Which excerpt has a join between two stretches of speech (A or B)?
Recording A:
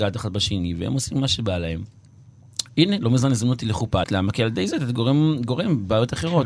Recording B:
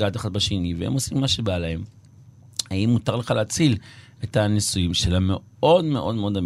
A